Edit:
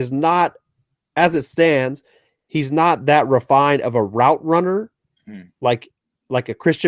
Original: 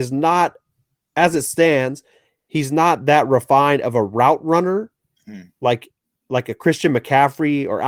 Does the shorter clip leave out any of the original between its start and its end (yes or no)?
no